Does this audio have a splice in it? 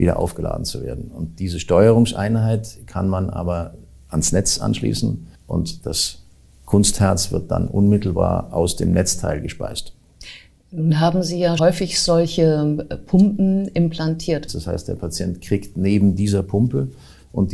yes; 3 cuts; at 5.4 s, 11.6 s, 14.5 s

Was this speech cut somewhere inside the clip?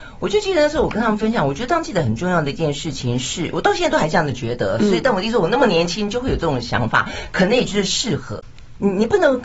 no; 0 cuts

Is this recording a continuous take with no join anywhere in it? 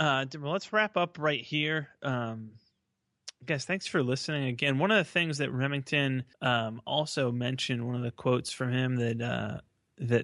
no; 1 cut; at 6.3 s

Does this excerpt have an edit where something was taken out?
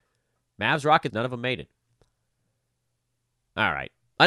yes; 1 cut; at 1.1 s

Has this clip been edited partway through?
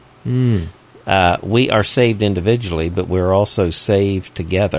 no; 0 cuts

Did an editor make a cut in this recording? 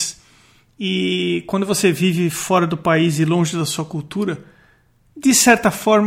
no; 0 cuts

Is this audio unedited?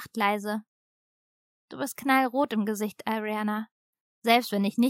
yes; 0 cuts

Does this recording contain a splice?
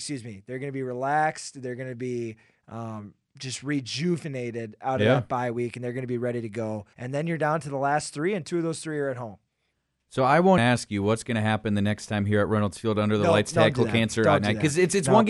yes; 2 cuts; at 6.9 s, 10.6 s

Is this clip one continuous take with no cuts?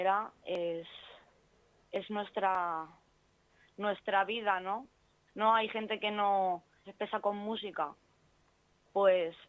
no; 2 cuts; at 5.3 s, 6.8 s

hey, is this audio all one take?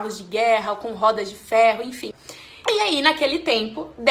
no; 1 cut; at 2.6 s

